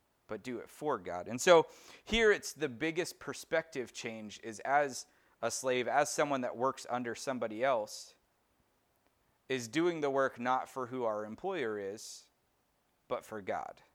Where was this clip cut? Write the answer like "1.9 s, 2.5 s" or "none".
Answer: none